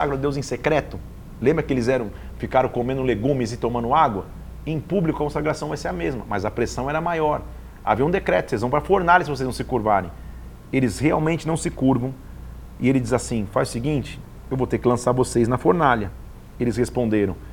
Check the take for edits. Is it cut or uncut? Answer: uncut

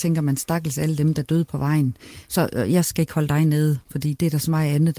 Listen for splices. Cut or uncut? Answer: uncut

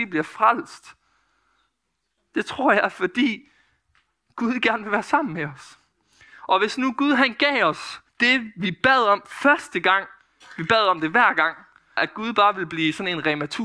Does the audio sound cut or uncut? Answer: cut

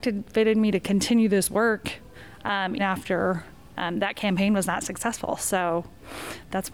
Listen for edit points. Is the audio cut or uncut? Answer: cut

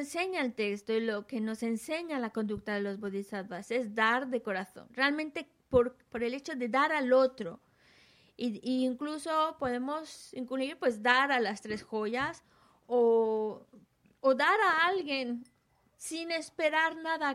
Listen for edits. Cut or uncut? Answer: uncut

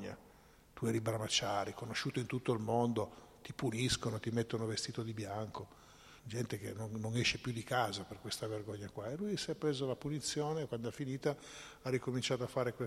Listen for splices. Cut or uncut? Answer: cut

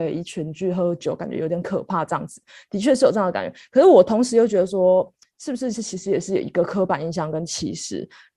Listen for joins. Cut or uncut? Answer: uncut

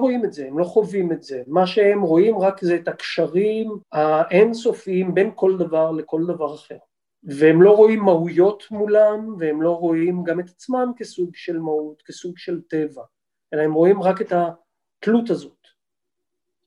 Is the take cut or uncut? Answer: cut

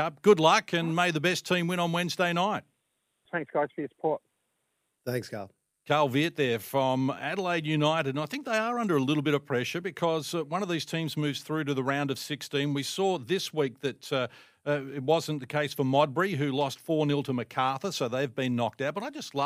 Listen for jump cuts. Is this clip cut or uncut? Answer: cut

